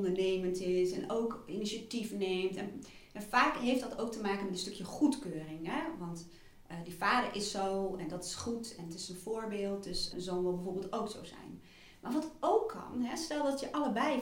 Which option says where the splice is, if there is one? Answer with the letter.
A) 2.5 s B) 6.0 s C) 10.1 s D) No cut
C